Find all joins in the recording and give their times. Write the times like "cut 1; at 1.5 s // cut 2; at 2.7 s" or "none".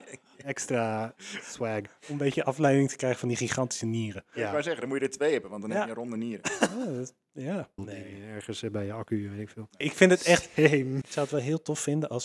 cut 1; at 7.8 s // cut 2; at 9.8 s // cut 3; at 11.0 s